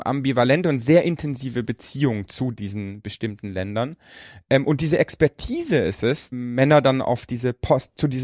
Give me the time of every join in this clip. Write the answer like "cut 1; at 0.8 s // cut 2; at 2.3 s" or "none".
cut 1; at 6.3 s

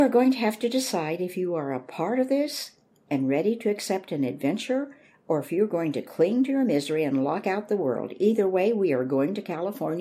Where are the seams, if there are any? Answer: none

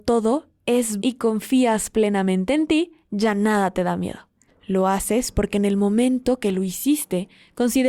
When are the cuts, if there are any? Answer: cut 1; at 1.0 s // cut 2; at 4.5 s

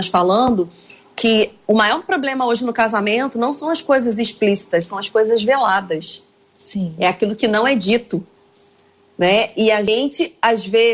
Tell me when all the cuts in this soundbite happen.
none

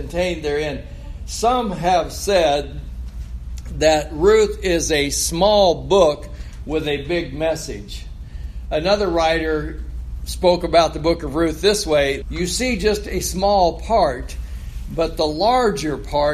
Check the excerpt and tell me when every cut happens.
cut 1; at 12.2 s

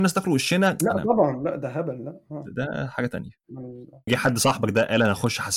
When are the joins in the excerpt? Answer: cut 1; at 4.1 s

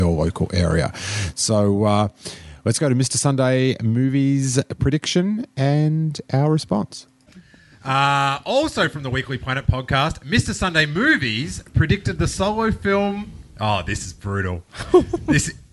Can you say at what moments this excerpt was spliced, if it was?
none

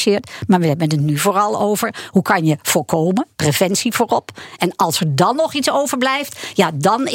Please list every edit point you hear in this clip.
cut 1; at 4.6 s

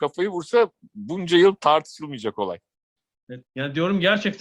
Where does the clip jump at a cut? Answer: cut 1; at 3.4 s

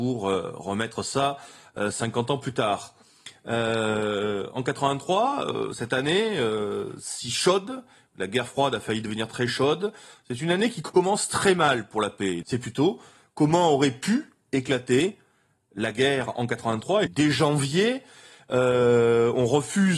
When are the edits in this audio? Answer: cut 1; at 12.4 s // cut 2; at 17.1 s

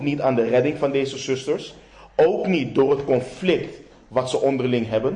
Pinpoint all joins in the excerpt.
none

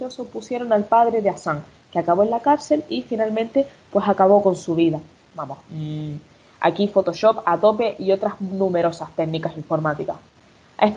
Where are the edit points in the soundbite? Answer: cut 1; at 5.2 s

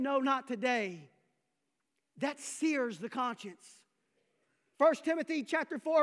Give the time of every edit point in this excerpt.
cut 1; at 4.7 s

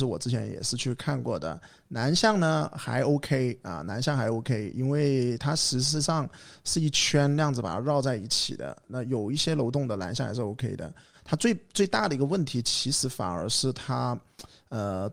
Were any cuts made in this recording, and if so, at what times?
none

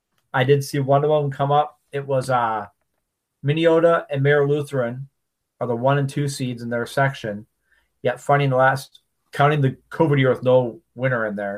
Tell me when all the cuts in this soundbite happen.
none

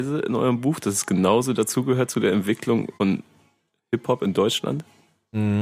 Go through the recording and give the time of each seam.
cut 1; at 3.0 s

